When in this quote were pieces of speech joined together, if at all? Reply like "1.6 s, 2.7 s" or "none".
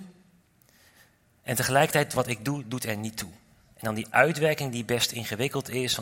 3.7 s